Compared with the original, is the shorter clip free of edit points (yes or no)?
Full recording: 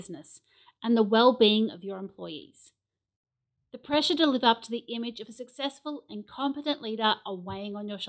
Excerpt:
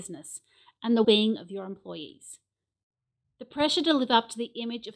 no